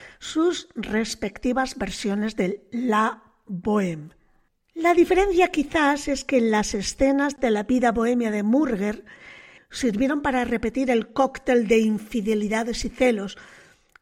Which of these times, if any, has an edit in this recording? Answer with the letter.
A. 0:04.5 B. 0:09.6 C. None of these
B